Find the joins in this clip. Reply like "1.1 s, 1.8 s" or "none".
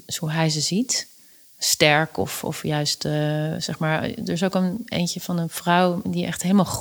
none